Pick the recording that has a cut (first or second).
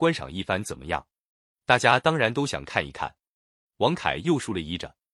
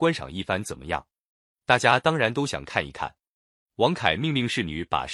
first